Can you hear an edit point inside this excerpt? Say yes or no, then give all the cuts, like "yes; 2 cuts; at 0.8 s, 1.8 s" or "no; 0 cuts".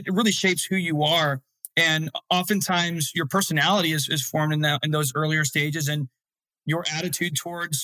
no; 0 cuts